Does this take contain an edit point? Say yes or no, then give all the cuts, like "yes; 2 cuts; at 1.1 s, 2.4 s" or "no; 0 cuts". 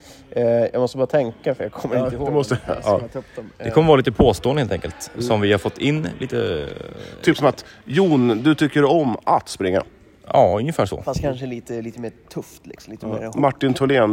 no; 0 cuts